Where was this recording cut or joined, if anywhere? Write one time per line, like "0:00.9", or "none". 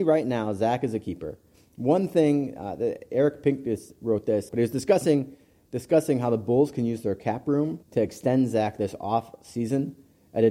0:04.5
0:07.8